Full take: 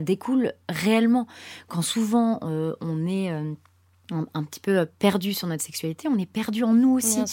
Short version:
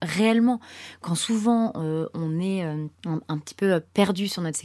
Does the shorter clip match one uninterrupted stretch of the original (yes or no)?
no